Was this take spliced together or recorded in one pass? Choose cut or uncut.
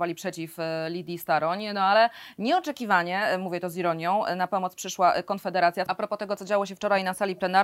cut